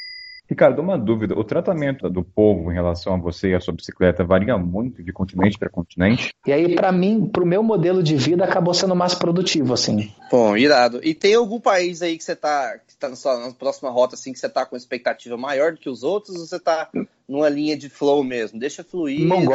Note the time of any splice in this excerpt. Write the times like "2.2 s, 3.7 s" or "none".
6.4 s